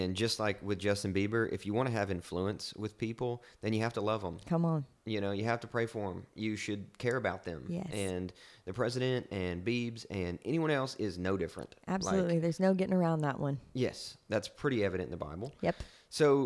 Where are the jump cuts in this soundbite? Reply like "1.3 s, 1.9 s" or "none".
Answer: none